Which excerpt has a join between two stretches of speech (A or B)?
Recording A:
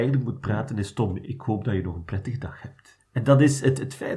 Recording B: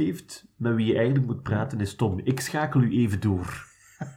A